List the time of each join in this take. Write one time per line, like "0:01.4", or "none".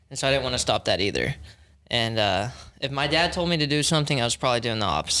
none